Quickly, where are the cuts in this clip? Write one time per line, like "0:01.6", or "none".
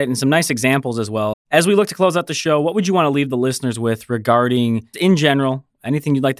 0:01.3
0:04.9